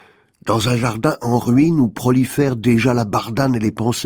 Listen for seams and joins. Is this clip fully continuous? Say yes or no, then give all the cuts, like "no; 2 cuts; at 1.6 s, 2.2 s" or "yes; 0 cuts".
yes; 0 cuts